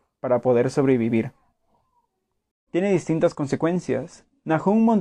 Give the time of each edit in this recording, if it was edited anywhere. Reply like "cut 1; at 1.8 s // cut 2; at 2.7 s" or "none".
cut 1; at 2.7 s

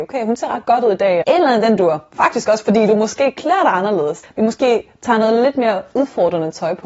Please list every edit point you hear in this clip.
cut 1; at 1.2 s // cut 2; at 4.2 s

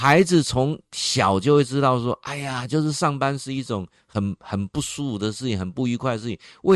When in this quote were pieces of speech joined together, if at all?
none

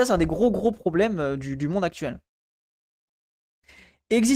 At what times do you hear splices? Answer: none

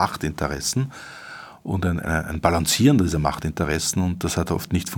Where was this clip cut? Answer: none

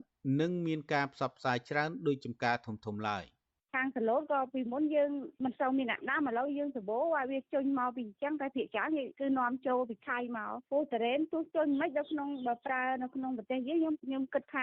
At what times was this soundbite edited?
none

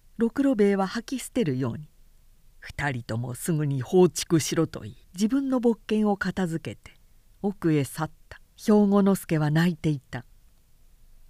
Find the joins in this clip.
cut 1; at 5.0 s // cut 2; at 8.5 s

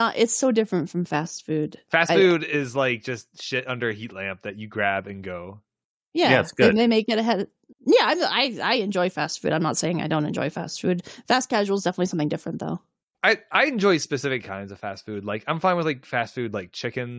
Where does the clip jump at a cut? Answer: none

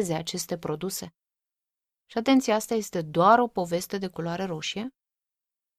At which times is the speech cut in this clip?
cut 1; at 2.0 s

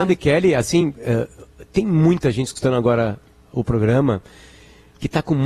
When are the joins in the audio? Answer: cut 1; at 3.4 s

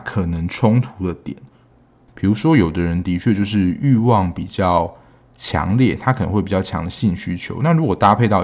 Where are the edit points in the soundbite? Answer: cut 1; at 2.1 s

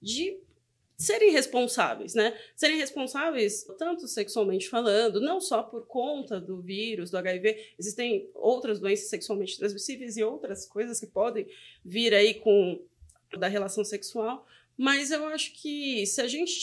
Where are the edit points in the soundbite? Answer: cut 1; at 3.7 s // cut 2; at 13.4 s

